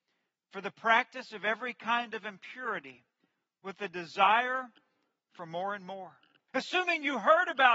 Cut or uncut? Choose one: cut